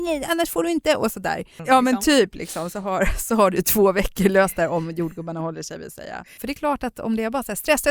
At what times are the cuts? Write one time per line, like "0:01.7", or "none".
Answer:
0:01.6
0:06.4